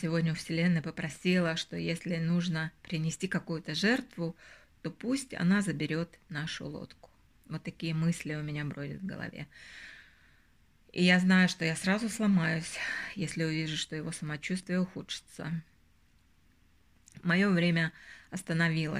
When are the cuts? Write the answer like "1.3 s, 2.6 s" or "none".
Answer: none